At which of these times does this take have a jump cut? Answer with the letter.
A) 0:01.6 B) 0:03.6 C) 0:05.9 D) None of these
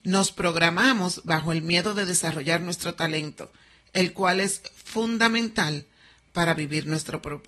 D